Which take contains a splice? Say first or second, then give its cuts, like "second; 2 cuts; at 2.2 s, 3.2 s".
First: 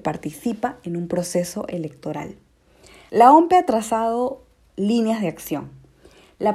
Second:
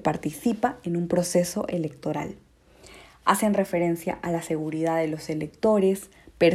first; 1 cut; at 3.1 s